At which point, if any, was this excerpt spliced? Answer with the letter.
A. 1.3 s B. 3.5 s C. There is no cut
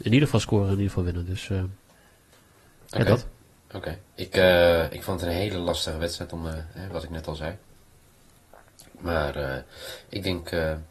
C